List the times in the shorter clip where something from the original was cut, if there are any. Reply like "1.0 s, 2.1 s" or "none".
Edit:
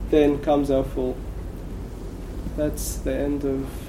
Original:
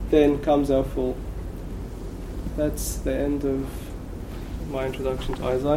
none